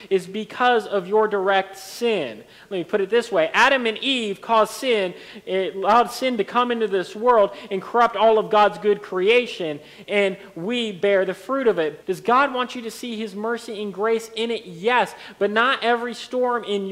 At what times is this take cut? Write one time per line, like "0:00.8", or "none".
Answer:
0:12.0